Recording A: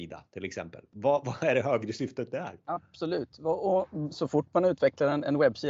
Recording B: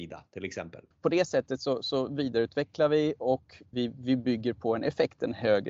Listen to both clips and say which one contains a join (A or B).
B